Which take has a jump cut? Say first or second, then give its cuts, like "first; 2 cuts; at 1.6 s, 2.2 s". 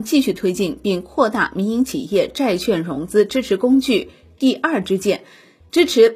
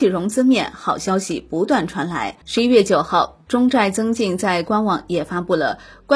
second; 1 cut; at 2.4 s